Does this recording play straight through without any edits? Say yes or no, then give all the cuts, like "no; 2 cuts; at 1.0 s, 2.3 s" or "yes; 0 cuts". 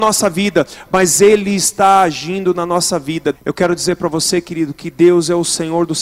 no; 1 cut; at 3.3 s